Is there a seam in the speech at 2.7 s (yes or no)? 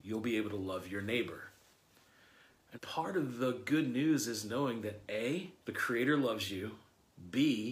yes